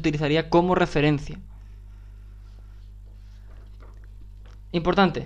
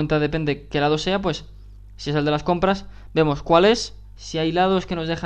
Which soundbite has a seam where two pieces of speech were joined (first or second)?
second